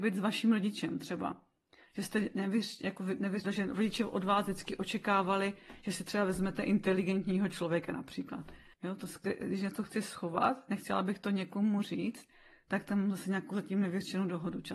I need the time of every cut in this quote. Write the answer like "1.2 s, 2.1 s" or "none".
3.4 s, 8.7 s